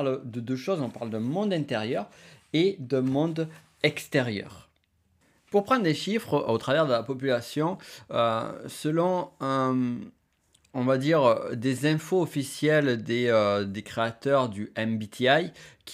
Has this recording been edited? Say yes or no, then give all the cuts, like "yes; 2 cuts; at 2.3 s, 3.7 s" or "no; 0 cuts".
no; 0 cuts